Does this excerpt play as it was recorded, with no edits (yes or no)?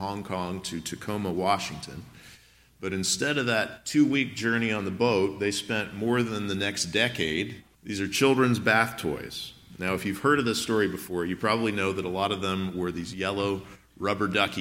no